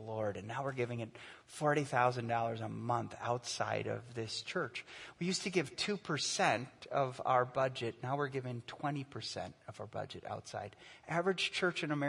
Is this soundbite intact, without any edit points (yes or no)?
yes